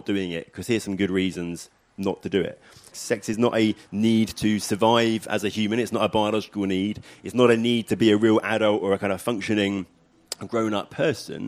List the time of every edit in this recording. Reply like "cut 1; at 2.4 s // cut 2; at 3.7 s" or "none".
cut 1; at 2.9 s